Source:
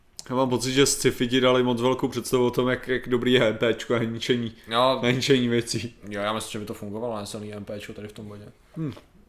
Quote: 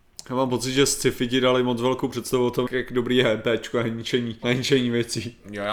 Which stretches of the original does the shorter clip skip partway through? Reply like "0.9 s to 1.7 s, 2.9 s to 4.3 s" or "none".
2.7 s to 2.8 s, 4.6 s to 5.0 s